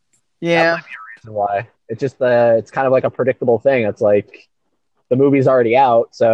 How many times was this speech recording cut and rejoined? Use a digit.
0